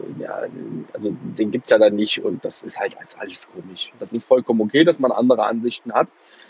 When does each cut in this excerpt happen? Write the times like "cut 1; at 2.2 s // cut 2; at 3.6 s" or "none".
cut 1; at 4.0 s